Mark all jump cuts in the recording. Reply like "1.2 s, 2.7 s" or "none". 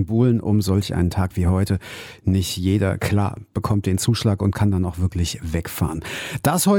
none

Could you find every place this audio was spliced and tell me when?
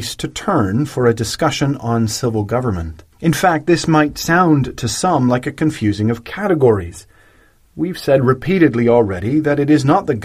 3.1 s

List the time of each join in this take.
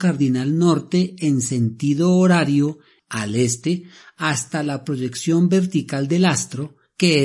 3.0 s

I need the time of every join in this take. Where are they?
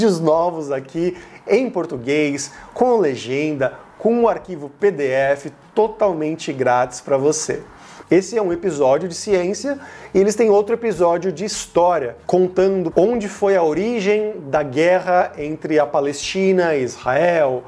8.0 s, 12.9 s

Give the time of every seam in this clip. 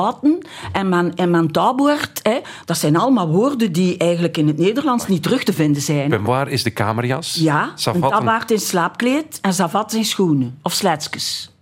none

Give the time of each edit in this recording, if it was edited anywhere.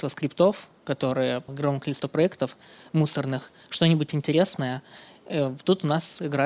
1.5 s

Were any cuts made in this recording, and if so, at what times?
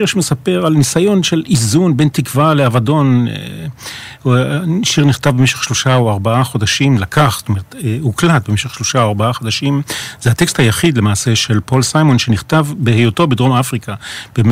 none

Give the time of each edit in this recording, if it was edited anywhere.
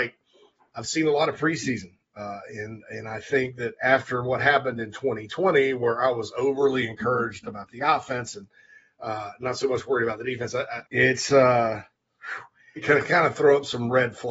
10.8 s, 12.8 s

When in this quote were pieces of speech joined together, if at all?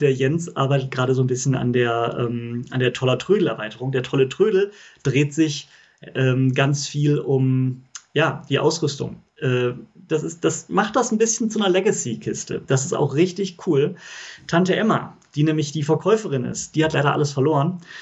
10.1 s, 16.7 s

